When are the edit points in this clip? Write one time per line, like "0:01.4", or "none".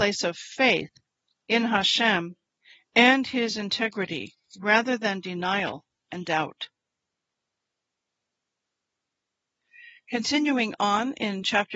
none